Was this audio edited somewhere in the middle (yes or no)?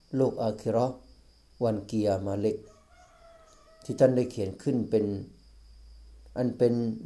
no